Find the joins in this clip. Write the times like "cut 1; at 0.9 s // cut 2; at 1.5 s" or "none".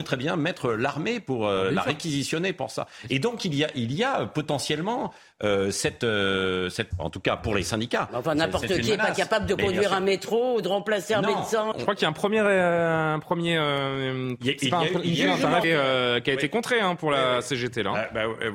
cut 1; at 6.9 s // cut 2; at 11.7 s // cut 3; at 15.6 s